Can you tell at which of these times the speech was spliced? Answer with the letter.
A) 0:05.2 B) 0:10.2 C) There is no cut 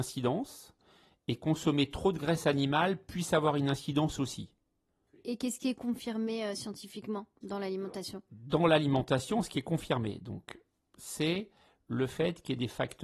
C